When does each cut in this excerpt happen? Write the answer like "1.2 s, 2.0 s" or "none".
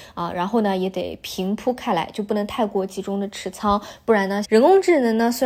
4.4 s

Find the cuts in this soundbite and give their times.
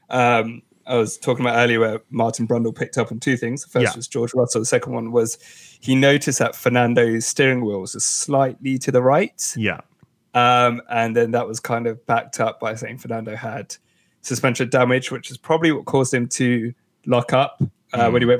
none

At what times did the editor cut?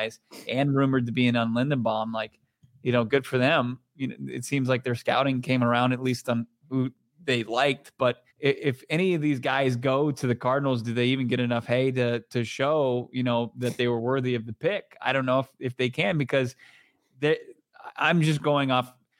8.3 s

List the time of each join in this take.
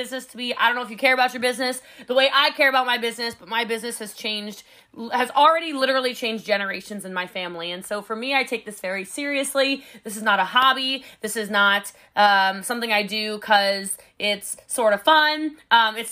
none

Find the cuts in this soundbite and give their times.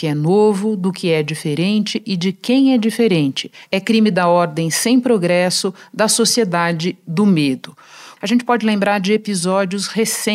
8.2 s

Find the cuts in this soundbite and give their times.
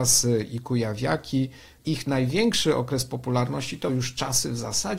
none

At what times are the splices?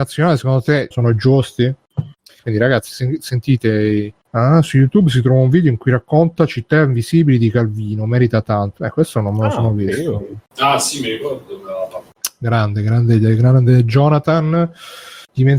0.9 s, 2.4 s

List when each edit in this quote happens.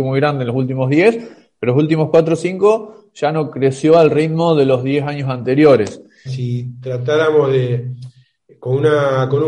6.3 s

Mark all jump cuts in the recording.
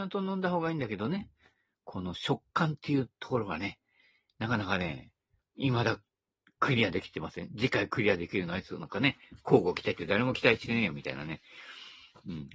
none

